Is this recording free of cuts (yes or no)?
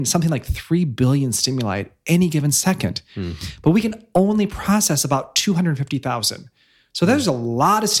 yes